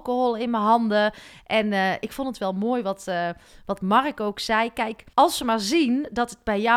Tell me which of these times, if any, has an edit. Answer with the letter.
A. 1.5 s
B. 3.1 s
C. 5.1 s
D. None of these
C